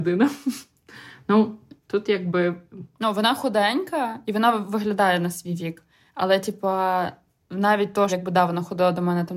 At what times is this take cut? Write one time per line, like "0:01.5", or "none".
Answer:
0:01.8
0:08.1